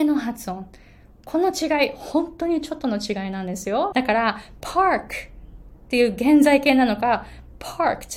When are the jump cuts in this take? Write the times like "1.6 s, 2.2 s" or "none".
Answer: 3.9 s